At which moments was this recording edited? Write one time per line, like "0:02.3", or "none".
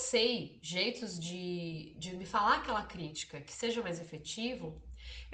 none